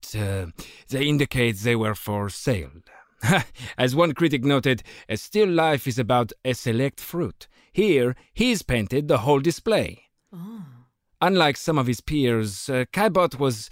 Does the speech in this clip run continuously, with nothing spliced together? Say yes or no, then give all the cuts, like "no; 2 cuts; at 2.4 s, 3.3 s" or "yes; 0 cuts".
yes; 0 cuts